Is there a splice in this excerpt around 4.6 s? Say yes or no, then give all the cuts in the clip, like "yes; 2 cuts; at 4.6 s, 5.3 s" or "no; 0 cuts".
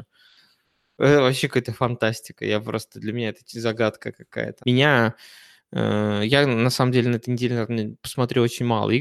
yes; 1 cut; at 4.6 s